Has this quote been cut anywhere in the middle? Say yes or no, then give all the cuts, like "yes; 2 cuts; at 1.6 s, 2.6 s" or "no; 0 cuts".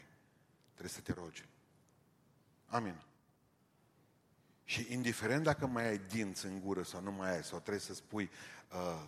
no; 0 cuts